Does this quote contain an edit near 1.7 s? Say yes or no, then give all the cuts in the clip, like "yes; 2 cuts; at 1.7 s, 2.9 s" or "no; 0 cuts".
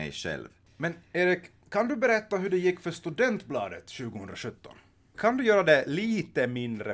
no; 1 cut; at 5.1 s